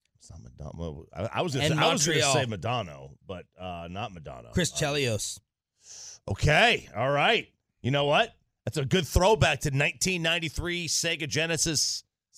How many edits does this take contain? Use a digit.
0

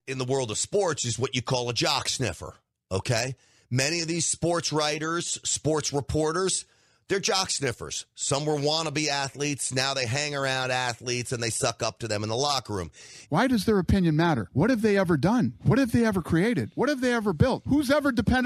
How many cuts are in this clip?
1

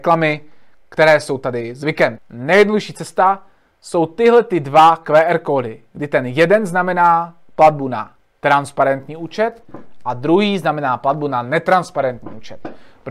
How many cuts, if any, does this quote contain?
1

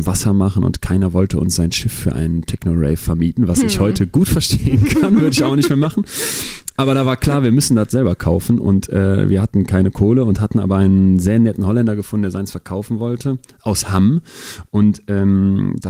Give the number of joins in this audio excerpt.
0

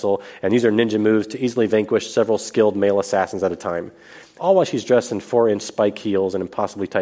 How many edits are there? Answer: 1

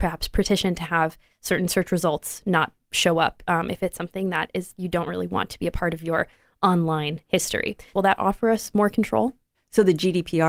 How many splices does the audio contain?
1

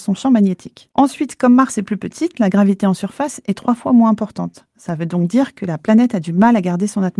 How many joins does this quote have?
0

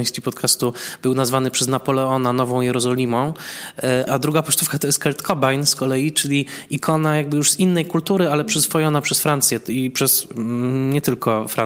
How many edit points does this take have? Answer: 1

